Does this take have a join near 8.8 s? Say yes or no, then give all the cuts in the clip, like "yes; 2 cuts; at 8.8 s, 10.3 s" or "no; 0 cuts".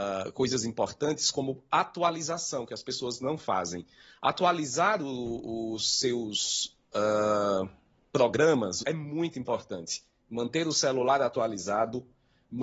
yes; 1 cut; at 8.8 s